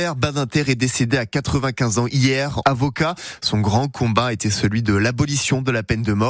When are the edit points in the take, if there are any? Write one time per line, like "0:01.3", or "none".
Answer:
0:02.6